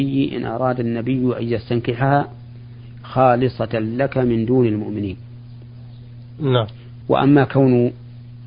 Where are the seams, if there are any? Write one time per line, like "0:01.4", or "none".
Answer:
0:07.0

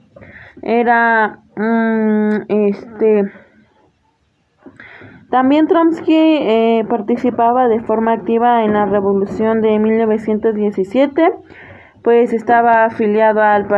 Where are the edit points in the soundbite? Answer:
0:05.3

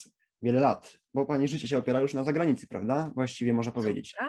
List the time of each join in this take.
none

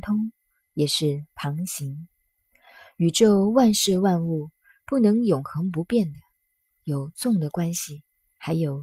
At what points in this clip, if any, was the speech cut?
none

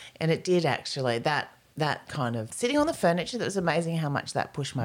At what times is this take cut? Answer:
0:02.5

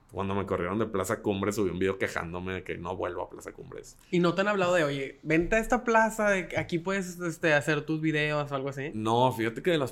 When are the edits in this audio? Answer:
none

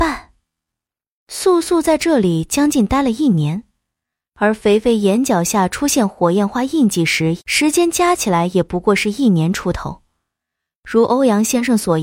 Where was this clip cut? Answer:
0:07.4

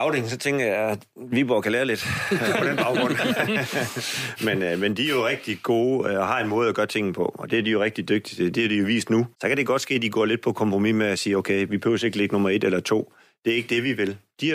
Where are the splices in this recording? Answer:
0:09.3

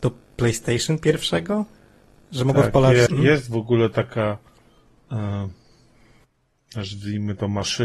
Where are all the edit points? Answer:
0:03.1

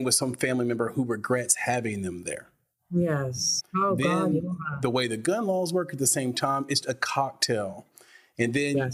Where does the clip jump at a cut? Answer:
0:03.6
0:06.8

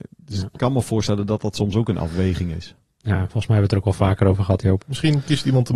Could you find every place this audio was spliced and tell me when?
0:03.0
0:04.8

